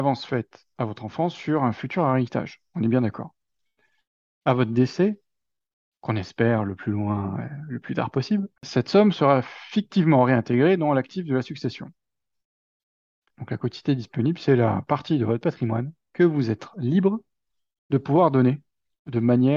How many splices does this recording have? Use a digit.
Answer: 2